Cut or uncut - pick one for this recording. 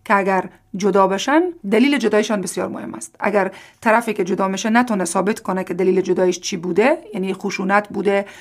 cut